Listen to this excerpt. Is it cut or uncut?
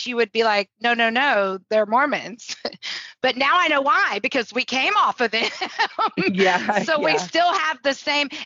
uncut